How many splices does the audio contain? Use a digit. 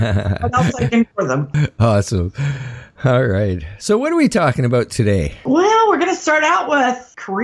1